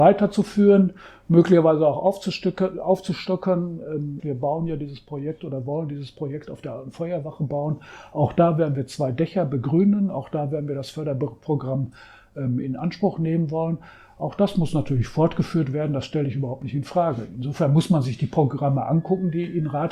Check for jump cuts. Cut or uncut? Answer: cut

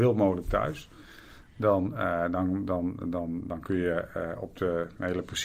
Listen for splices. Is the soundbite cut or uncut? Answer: uncut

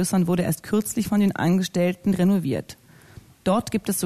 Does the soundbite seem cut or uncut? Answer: uncut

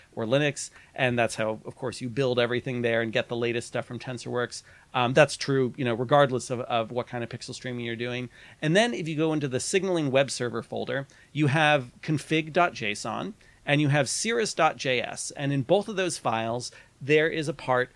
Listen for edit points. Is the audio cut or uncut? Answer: uncut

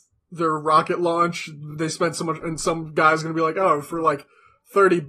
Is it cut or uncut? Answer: uncut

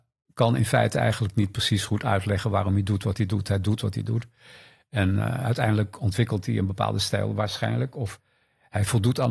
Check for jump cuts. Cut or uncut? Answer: uncut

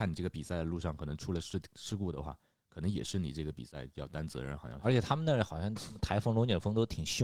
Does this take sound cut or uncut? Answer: uncut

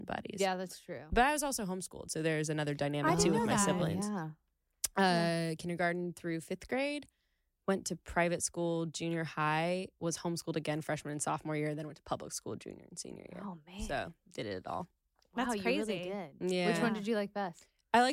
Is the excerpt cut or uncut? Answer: uncut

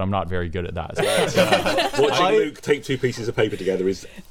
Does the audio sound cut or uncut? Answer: cut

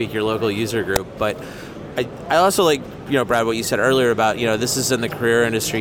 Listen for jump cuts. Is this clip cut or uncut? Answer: uncut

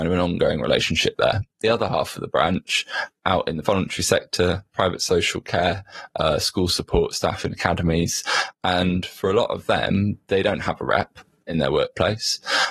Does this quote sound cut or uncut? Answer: uncut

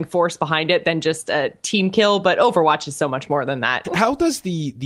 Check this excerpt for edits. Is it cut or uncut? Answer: cut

